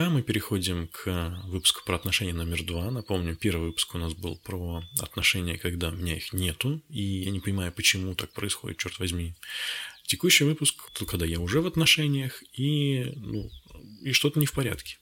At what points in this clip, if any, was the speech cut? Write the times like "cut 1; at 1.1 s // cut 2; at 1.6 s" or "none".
cut 1; at 10.9 s